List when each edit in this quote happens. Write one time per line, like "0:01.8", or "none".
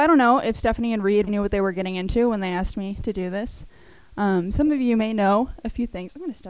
0:01.3

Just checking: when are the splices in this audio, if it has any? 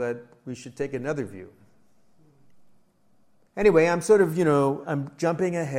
0:03.5
0:04.8

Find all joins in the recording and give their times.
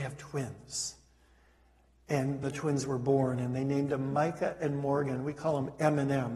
0:02.4

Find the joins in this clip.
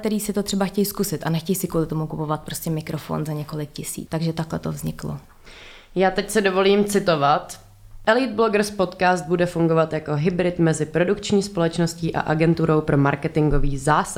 0:04.1

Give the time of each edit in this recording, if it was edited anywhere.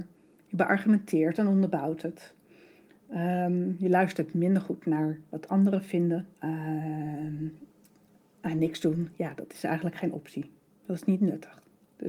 0:06.3

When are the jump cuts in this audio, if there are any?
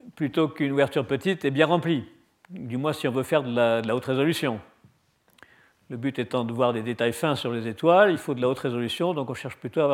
none

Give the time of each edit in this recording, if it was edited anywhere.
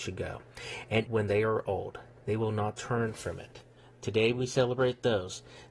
0:01.1

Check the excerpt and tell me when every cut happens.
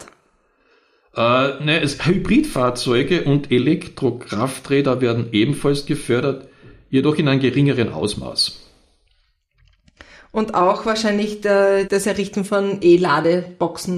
0:11.9

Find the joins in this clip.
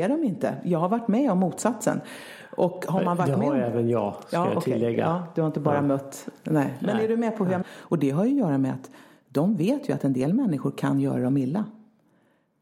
0:07.6

